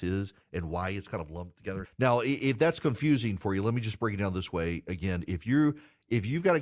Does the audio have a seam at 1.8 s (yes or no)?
yes